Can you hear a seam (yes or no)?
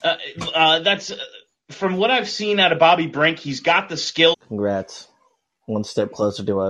yes